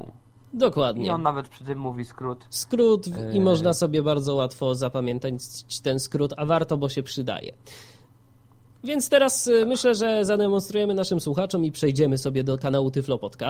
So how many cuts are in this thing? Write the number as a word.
zero